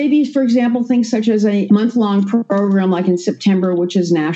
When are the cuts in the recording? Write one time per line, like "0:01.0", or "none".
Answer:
0:01.7